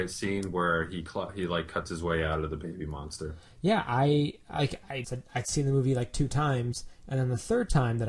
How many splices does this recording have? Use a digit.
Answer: 1